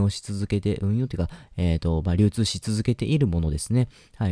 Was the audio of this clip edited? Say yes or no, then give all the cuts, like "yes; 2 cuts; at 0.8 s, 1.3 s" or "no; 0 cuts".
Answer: no; 0 cuts